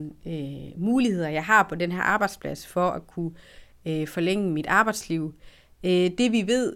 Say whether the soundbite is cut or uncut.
uncut